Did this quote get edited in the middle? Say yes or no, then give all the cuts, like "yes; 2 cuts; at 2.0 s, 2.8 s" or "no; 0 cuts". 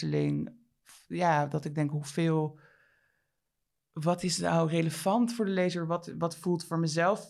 yes; 1 cut; at 6.1 s